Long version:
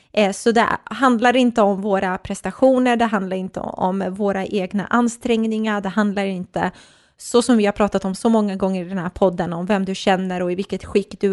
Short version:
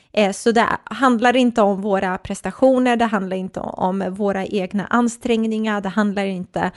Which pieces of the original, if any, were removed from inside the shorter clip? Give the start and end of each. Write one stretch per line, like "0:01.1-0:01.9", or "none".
none